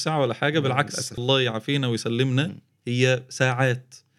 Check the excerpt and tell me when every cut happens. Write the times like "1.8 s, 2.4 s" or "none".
1.2 s